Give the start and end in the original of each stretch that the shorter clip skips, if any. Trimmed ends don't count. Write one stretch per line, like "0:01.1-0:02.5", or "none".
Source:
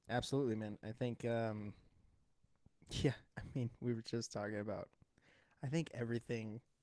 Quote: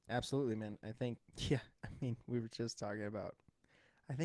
0:01.2-0:02.7